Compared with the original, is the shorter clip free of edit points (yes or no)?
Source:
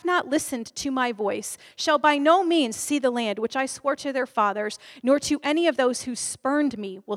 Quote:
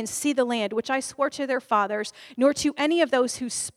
yes